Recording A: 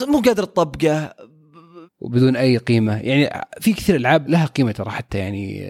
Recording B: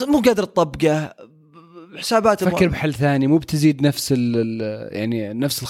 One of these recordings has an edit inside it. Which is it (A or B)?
A